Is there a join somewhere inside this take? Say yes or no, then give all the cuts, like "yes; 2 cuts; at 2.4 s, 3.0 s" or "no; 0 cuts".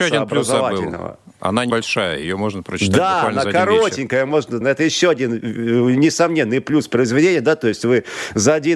yes; 2 cuts; at 1.7 s, 4.6 s